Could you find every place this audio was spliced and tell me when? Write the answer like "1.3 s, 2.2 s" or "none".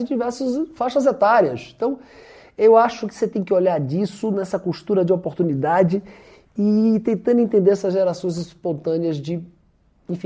none